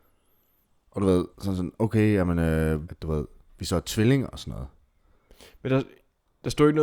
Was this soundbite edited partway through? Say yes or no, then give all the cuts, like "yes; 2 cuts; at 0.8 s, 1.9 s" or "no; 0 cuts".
yes; 2 cuts; at 1.3 s, 2.8 s